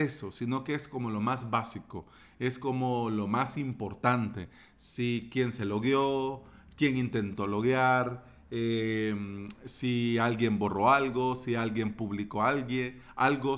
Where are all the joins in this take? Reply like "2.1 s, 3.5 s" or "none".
none